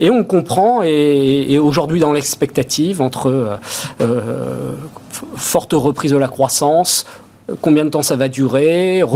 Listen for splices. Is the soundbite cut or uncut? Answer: uncut